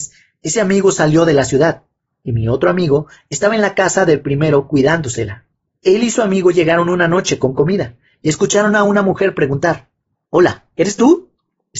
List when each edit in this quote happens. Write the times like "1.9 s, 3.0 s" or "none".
none